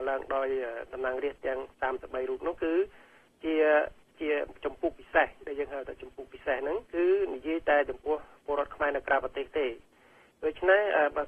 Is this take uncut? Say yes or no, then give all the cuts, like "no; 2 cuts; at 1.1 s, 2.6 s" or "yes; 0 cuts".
no; 1 cut; at 6.9 s